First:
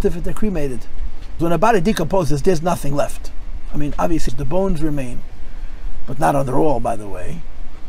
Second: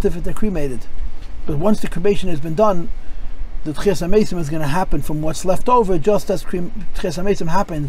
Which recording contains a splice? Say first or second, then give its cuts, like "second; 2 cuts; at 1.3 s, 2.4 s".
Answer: first; 2 cuts; at 1.4 s, 4.3 s